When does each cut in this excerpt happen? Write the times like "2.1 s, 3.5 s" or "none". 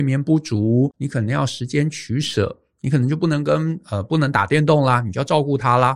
0.9 s